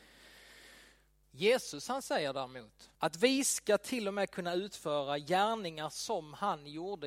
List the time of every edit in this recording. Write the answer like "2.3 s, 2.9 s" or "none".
1.2 s, 2.9 s

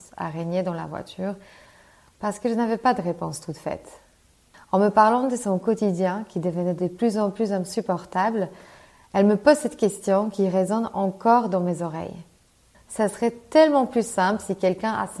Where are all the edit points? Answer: 4.5 s, 12.7 s

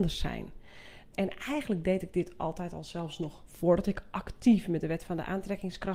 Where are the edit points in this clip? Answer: 1.1 s

